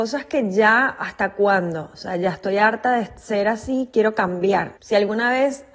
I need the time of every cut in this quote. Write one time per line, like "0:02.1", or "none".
0:04.8